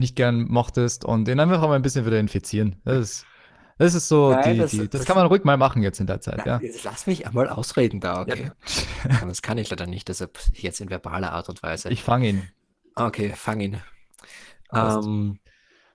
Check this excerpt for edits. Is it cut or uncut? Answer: cut